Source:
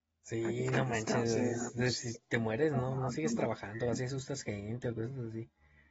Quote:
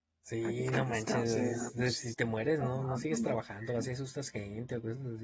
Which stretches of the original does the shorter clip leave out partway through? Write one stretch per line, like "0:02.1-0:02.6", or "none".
0:02.1-0:02.3